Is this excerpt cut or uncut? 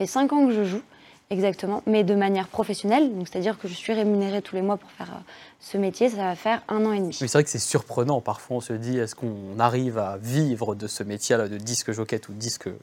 uncut